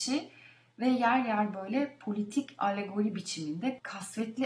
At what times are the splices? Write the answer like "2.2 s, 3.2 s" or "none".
none